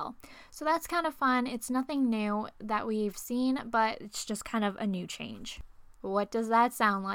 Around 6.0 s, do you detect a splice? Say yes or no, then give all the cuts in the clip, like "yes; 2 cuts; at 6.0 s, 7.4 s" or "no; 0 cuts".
yes; 1 cut; at 6.0 s